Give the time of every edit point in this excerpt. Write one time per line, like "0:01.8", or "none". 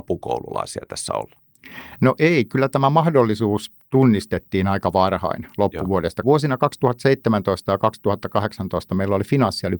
0:06.2